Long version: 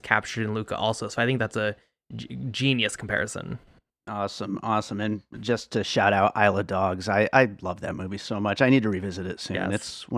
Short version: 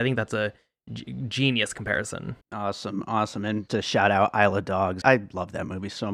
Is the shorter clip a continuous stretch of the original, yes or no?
no